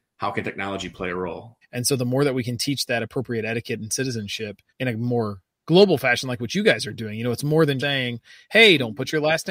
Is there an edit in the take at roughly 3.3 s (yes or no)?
no